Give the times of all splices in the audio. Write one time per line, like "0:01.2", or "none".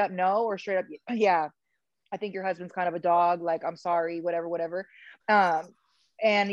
0:05.2